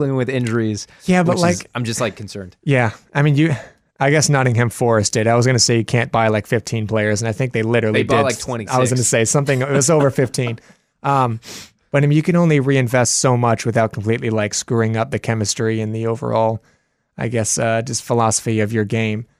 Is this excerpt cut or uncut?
uncut